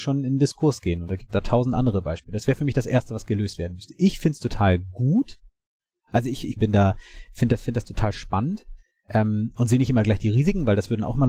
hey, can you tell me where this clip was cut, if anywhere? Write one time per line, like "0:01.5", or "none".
0:06.6